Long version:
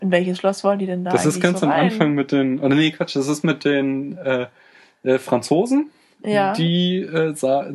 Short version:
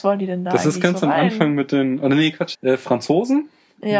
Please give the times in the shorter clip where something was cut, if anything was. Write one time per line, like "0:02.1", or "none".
0:02.5